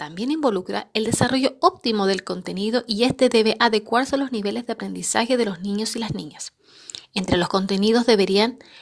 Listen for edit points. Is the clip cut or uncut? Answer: uncut